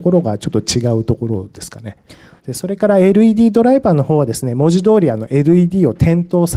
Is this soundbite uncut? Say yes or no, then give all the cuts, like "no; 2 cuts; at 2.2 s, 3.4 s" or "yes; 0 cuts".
no; 1 cut; at 2.4 s